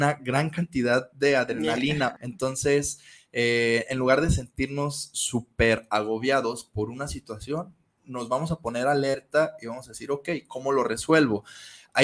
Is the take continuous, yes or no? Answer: no